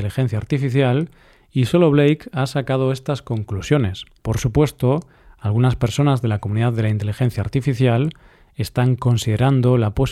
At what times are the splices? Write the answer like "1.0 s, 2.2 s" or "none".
4.2 s